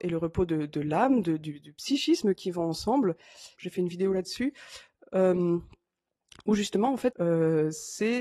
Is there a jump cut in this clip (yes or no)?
yes